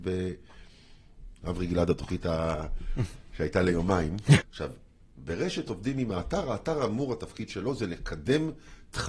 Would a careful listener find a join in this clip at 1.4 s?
yes; 2 cuts; at 1.4 s, 4.4 s

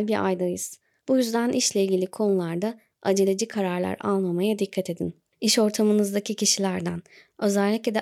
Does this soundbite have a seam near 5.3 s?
yes; 2 cuts; at 1.0 s, 5.3 s

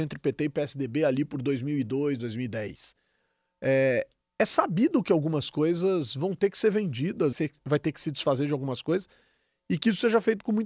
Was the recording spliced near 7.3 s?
yes; 2 cuts; at 2.2 s, 7.3 s

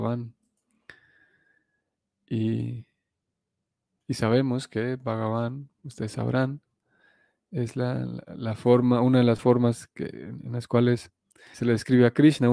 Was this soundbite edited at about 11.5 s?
yes; 1 cut; at 11.5 s

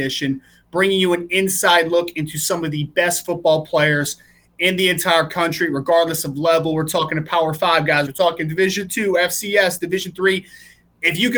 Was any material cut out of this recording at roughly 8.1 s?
yes; 1 cut; at 8.1 s

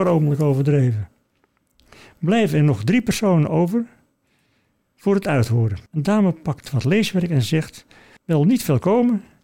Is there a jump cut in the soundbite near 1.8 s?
no; 2 cuts; at 5.9 s, 8.2 s

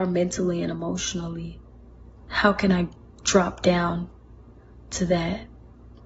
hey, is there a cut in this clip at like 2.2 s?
yes; 1 cut; at 2.2 s

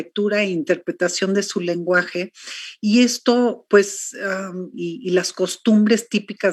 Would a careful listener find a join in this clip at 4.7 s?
yes; 1 cut; at 4.7 s

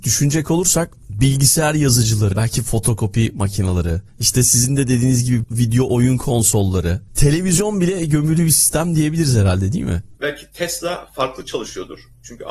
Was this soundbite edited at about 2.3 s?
yes; 2 cuts; at 2.3 s, 10.2 s

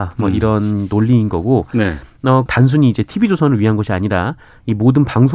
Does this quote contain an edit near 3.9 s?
no; 1 cut; at 2.5 s

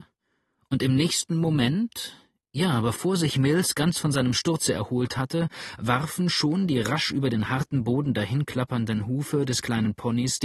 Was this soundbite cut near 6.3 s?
no; 0 cuts

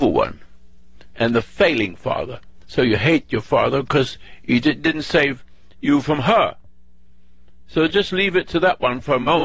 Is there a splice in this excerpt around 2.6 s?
no; 1 cut; at 1.1 s

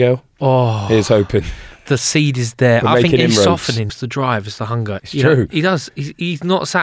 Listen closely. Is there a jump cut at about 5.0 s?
yes; 2 cuts; at 3.9 s, 5.0 s

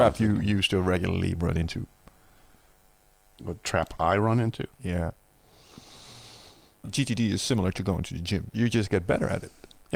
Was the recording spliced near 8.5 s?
yes; 2 cuts; at 6.8 s, 8.5 s

